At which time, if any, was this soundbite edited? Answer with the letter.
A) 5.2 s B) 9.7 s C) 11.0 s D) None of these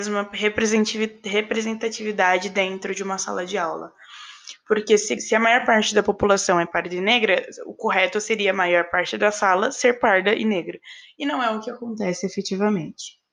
A